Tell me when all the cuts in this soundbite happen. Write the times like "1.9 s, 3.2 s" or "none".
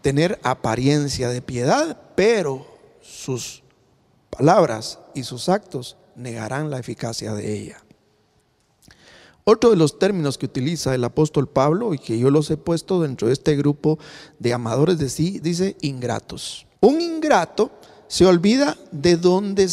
15.4 s, 16.8 s

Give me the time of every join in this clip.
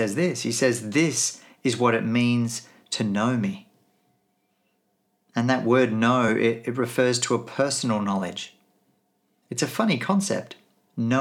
none

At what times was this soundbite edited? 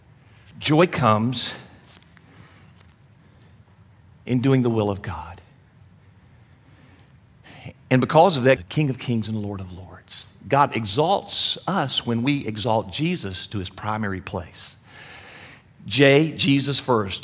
8.6 s

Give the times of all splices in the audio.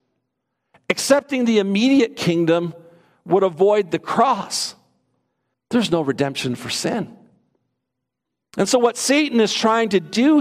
5.5 s

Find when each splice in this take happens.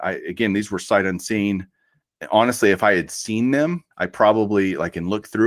3.9 s

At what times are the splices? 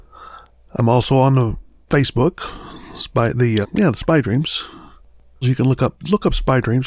3.6 s, 5.4 s

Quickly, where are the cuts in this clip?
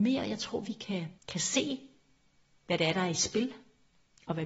1.2 s

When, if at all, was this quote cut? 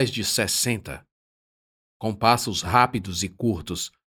none

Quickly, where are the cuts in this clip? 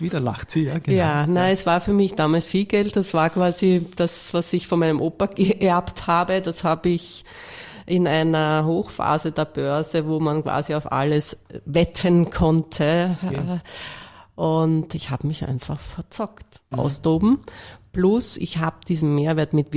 16.7 s

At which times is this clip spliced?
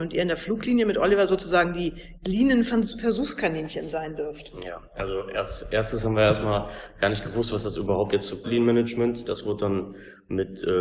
8.4 s

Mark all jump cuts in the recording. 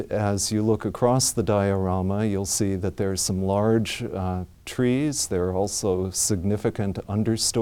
none

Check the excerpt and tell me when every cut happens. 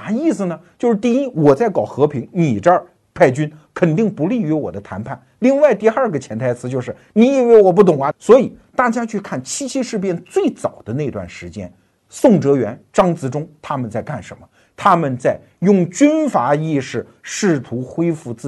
8.1 s

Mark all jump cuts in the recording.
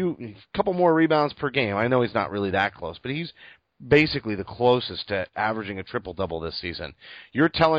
none

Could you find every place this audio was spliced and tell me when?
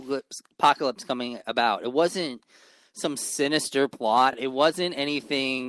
none

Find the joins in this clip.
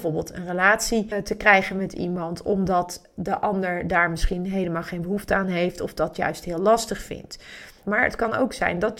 1.1 s, 7.8 s

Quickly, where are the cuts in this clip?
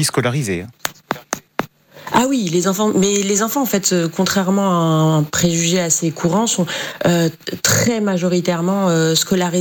none

